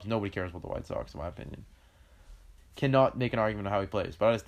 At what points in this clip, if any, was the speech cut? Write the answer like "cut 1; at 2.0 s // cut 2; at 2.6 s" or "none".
cut 1; at 2.6 s